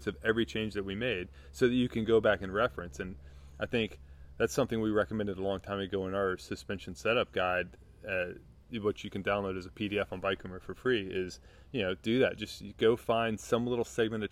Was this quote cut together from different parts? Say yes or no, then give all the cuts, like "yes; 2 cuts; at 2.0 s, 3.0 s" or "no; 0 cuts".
no; 0 cuts